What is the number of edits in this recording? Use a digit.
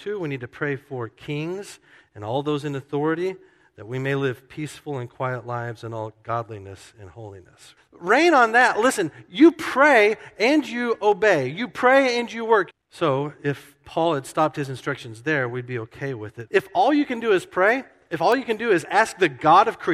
3